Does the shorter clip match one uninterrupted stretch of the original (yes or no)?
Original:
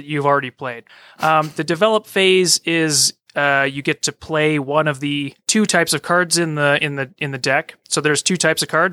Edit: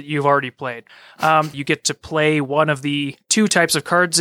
no